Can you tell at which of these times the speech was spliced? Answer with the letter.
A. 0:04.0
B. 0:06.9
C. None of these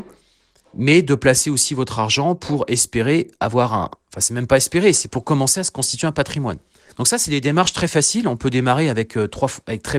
C